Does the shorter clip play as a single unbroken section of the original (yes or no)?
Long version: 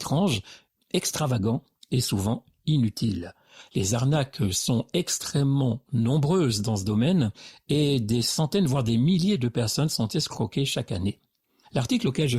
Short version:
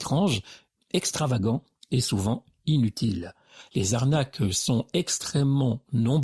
yes